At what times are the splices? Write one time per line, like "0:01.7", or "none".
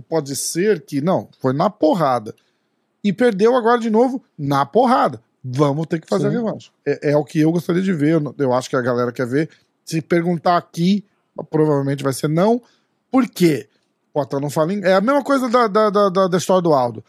none